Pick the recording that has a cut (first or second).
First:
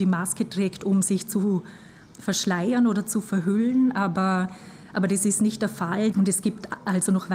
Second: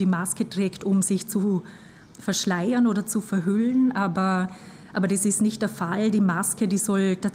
first